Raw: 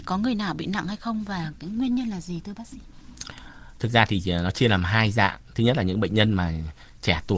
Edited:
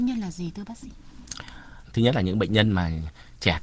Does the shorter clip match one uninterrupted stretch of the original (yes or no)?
no